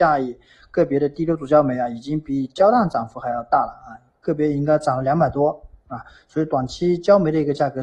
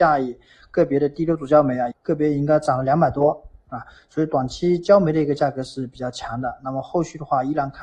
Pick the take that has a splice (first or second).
second